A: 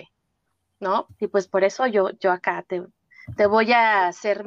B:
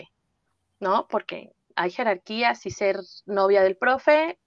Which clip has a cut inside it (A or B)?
A